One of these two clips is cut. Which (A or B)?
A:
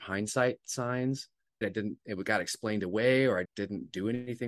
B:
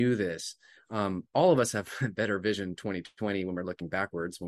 A